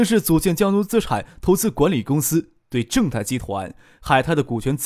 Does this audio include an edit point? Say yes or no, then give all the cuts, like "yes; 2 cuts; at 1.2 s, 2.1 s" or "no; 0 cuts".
no; 0 cuts